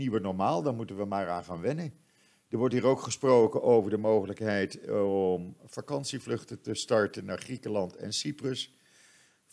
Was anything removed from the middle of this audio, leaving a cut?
no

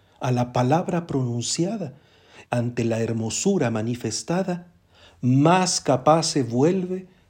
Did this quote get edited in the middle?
yes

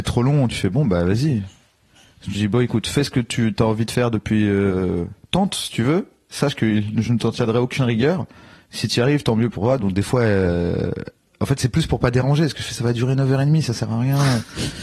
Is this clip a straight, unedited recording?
yes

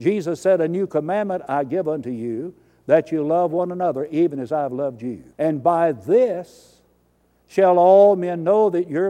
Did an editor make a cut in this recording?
yes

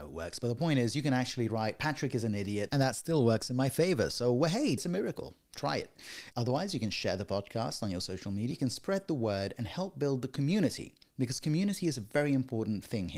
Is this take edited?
yes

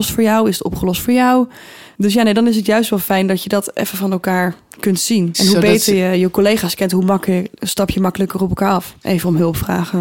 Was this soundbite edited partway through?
yes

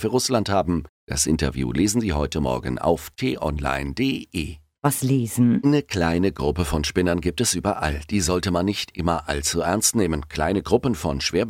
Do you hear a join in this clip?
yes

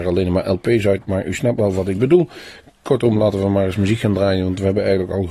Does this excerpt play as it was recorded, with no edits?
yes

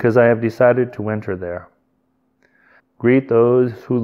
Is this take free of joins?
no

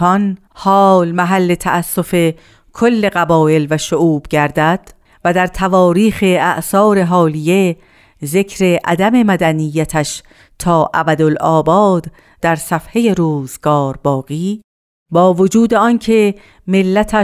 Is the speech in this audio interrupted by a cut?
no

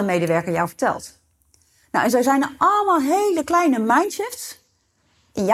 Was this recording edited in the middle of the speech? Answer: no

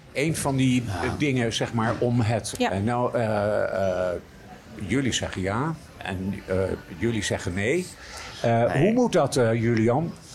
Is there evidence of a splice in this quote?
yes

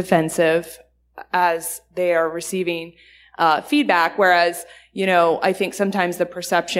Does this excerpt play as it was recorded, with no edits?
yes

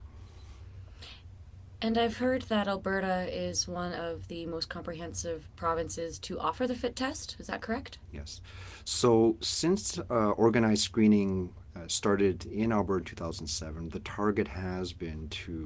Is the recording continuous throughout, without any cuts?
yes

